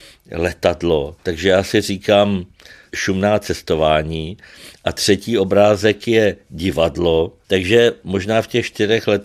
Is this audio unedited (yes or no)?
no